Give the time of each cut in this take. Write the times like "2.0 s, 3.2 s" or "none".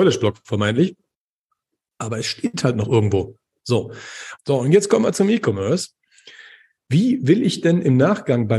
4.4 s